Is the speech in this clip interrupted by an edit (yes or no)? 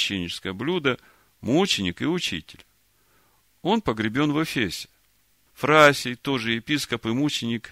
yes